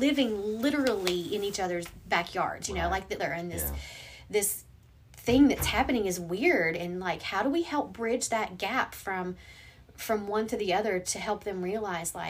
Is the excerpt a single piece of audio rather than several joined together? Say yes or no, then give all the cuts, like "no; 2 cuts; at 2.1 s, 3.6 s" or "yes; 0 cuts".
no; 1 cut; at 3.2 s